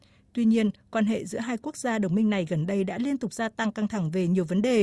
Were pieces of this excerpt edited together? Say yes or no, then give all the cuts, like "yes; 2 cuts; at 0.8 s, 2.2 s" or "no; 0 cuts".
no; 0 cuts